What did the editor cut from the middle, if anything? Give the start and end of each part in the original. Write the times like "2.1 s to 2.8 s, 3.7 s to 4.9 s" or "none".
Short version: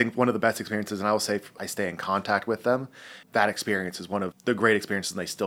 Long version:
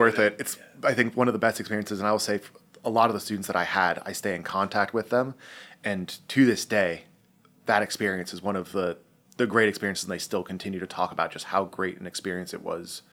2.6 s to 4.0 s, 5.7 s to 7.6 s, 8.6 s to 9.2 s